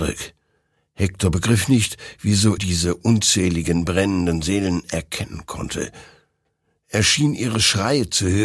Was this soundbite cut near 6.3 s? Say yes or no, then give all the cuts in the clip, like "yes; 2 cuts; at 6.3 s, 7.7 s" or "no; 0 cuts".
no; 1 cut; at 2.6 s